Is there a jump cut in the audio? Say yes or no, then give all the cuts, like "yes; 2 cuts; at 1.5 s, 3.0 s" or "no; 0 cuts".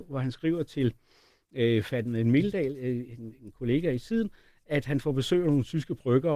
no; 0 cuts